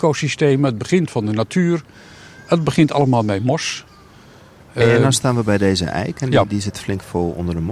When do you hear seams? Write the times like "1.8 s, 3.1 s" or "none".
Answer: none